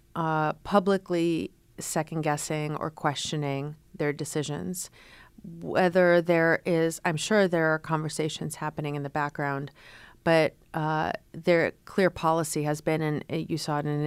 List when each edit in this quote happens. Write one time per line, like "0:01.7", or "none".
none